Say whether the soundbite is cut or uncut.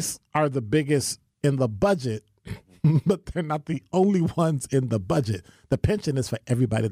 uncut